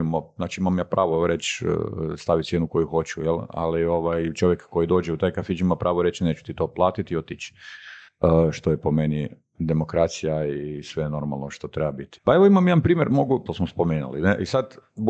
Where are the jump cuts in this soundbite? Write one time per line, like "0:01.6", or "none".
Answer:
0:12.2
0:13.5